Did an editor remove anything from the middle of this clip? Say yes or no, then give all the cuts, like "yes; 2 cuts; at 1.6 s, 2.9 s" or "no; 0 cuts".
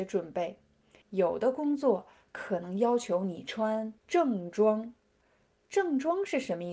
yes; 2 cuts; at 1.0 s, 4.0 s